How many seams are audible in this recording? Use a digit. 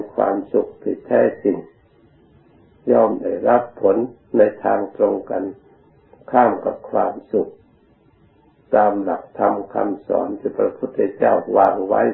0